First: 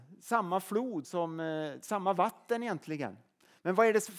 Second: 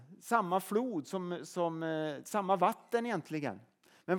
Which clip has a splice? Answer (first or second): first